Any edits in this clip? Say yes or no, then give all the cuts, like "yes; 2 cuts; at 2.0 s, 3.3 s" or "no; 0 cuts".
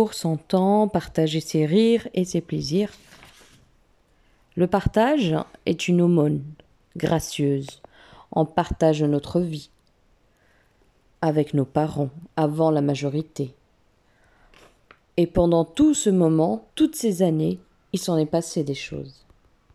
yes; 1 cut; at 16.7 s